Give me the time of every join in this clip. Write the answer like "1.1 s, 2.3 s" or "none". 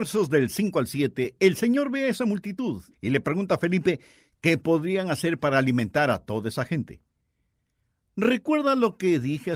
2.9 s

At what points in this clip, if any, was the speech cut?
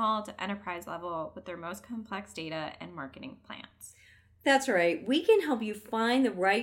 none

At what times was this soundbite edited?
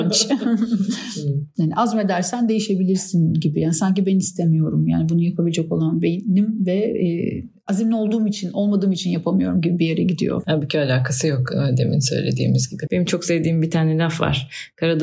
12.9 s

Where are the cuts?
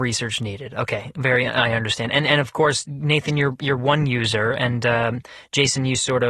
none

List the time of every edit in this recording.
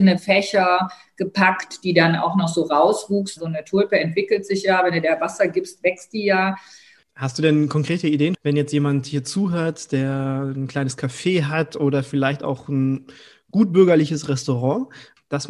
3.4 s, 7.0 s

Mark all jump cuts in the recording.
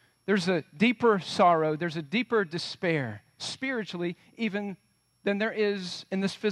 none

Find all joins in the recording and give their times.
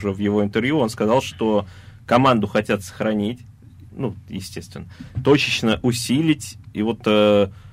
none

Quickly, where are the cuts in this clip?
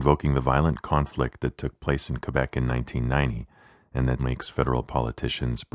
4.2 s

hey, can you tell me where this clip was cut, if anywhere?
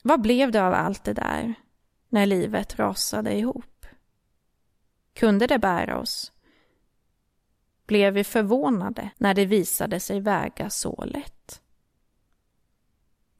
9.1 s

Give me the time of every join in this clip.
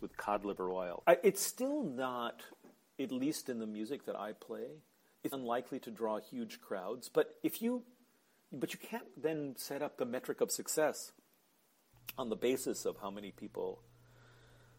1.0 s, 5.3 s

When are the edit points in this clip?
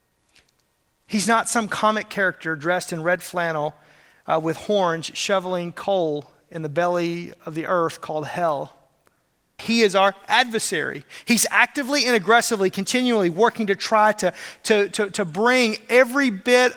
9.6 s, 14.9 s

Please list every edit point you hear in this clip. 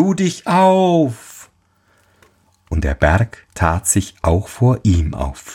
none

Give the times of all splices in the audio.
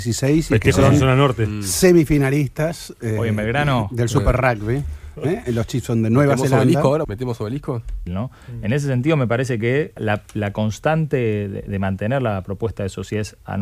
7.0 s, 8.1 s, 10.0 s

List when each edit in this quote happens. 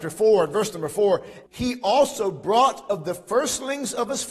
1.5 s

